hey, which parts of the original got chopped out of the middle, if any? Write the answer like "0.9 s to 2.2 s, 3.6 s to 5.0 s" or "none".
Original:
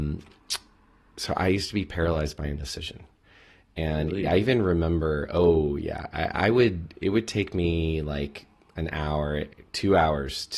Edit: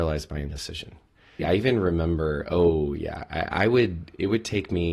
3.5 s to 4.2 s